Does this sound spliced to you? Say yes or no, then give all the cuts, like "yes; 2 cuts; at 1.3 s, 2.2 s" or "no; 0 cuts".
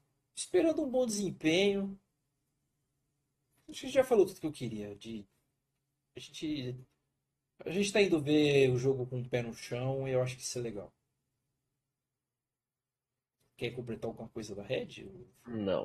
no; 0 cuts